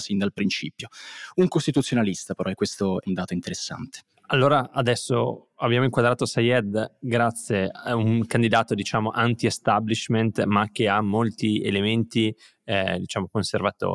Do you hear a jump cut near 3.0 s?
yes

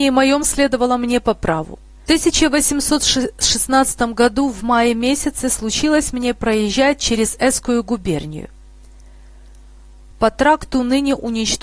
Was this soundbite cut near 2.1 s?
yes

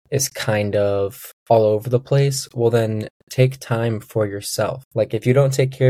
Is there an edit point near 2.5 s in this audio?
no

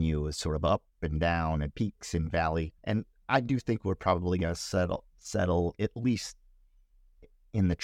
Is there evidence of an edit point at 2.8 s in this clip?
yes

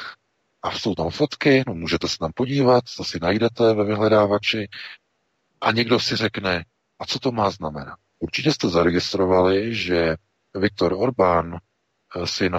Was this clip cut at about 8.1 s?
yes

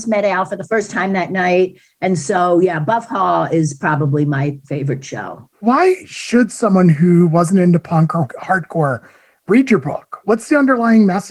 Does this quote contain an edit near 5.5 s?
yes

